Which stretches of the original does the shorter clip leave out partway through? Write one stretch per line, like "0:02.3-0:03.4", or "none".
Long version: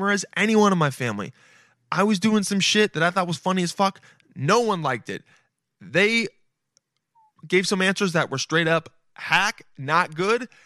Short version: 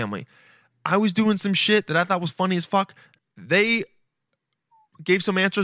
0:04.2-0:05.6